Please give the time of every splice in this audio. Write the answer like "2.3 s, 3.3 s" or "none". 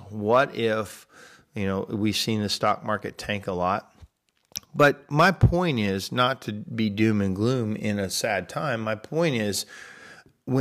none